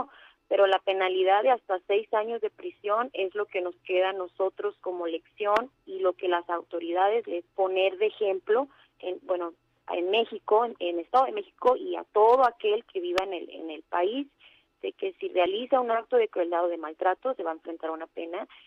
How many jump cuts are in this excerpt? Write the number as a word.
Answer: one